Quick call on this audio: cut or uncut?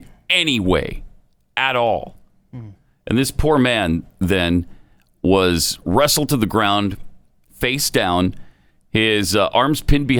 uncut